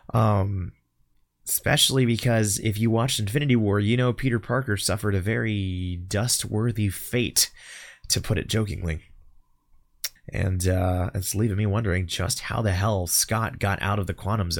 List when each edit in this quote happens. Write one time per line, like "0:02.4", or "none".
0:10.2